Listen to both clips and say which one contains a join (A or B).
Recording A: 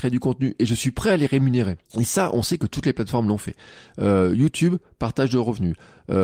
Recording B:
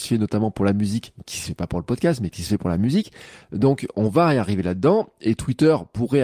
A